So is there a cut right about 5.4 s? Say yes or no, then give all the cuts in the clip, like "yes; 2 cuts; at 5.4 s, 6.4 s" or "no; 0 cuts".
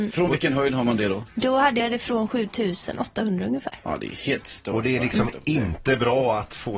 no; 0 cuts